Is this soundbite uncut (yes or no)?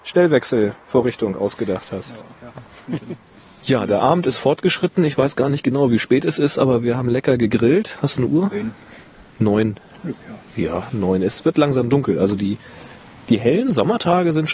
yes